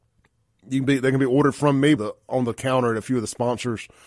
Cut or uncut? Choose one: cut